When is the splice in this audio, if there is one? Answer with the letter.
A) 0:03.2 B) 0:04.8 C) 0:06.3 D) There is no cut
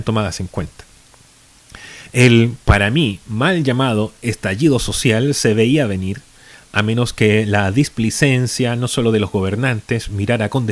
D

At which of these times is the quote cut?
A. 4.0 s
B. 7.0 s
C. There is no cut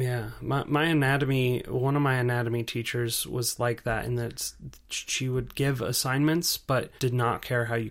B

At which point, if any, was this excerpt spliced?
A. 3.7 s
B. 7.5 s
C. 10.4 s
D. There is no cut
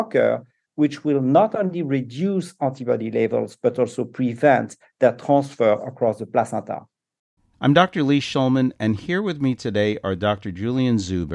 B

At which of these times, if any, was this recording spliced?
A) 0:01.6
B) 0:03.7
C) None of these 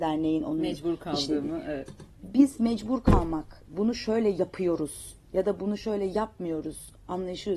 B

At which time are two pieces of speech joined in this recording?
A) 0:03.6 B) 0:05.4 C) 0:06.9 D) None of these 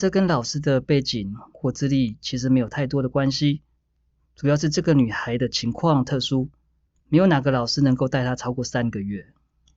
D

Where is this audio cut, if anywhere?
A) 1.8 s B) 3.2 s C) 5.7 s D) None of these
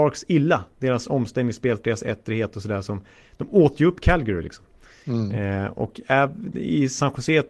A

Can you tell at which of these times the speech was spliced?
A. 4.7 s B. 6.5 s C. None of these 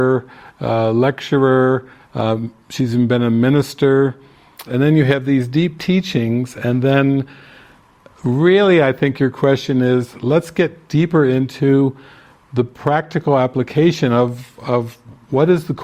A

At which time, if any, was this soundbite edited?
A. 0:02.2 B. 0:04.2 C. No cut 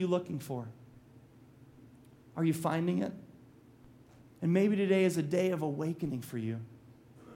B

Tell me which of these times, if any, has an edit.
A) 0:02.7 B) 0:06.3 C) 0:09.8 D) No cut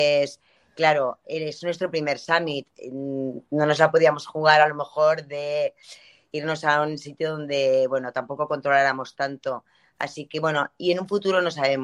D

